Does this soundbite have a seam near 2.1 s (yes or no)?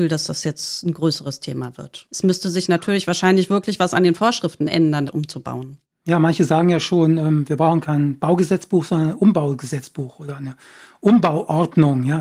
no